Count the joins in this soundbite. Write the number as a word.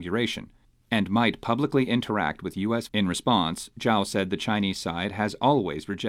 one